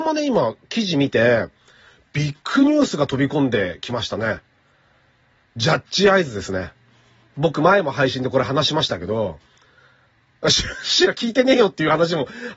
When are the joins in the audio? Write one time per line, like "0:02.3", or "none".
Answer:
none